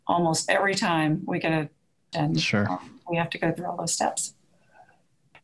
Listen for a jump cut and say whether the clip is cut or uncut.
cut